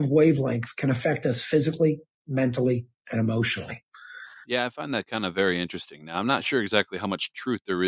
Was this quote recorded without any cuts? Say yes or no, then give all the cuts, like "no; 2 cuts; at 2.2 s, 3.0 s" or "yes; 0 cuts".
no; 1 cut; at 4.4 s